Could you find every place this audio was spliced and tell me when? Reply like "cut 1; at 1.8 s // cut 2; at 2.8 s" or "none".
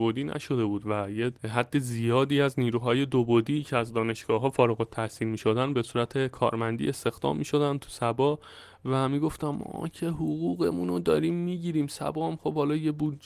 cut 1; at 1.4 s